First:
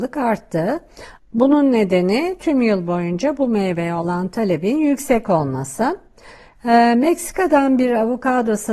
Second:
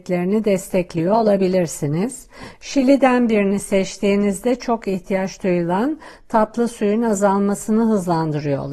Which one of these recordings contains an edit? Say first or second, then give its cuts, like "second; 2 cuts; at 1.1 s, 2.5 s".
first; 1 cut; at 1.2 s